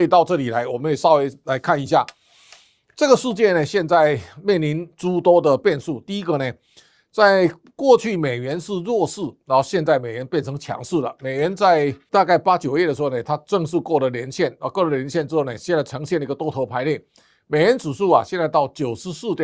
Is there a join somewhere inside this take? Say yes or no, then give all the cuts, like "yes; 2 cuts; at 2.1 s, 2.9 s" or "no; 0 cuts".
no; 0 cuts